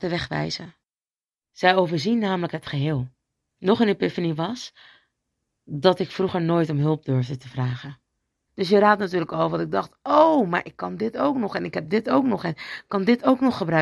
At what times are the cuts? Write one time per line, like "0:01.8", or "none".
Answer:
0:03.5
0:08.5